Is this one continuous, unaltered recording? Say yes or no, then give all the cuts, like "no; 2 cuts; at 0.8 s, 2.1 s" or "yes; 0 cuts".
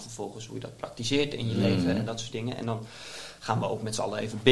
yes; 0 cuts